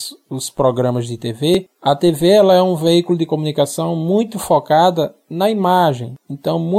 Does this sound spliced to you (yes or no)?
no